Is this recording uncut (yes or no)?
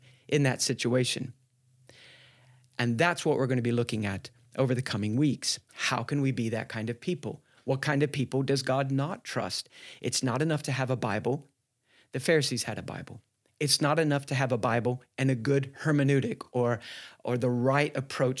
yes